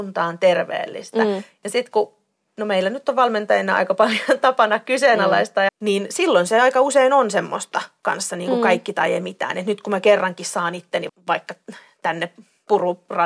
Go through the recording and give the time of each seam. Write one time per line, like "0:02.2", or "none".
0:05.7
0:11.1